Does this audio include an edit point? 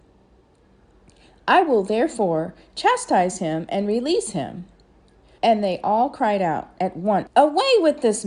yes; 2 cuts; at 5.4 s, 7.3 s

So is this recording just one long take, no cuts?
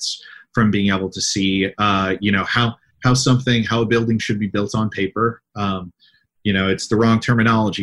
yes; 0 cuts

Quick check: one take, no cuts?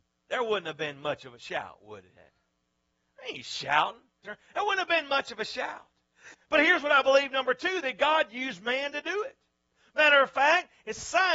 no; 2 cuts; at 4.2 s, 6.3 s

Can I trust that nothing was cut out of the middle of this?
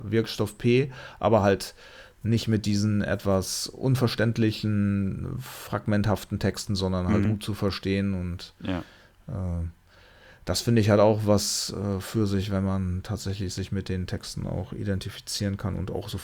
yes; 0 cuts

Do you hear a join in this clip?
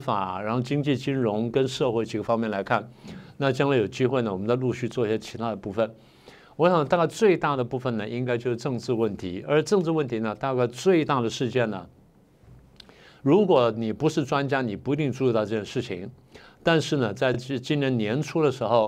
no; 0 cuts

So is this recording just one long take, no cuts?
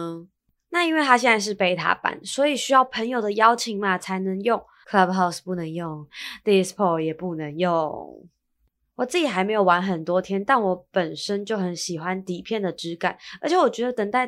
no; 1 cut; at 4.8 s

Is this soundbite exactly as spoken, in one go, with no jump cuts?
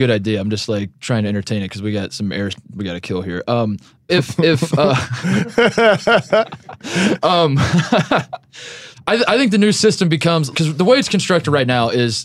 no; 3 cuts; at 4.1 s, 8.9 s, 10.5 s

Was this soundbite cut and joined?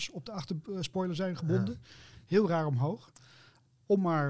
no; 0 cuts

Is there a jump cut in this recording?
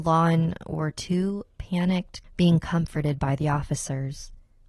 yes; 1 cut; at 2.2 s

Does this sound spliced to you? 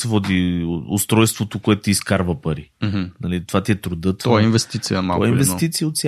no; 0 cuts

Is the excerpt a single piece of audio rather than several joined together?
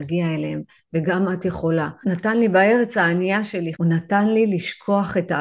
no; 2 cuts; at 2.0 s, 3.7 s

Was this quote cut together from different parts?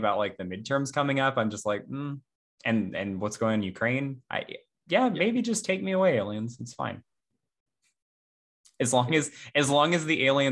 no; 0 cuts

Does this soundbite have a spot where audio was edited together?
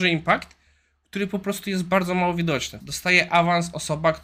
yes; 1 cut; at 2.8 s

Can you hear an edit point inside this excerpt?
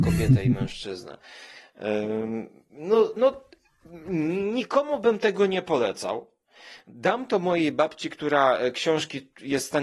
no; 0 cuts

